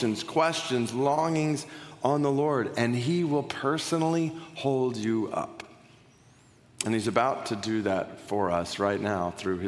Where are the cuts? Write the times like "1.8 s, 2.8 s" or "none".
none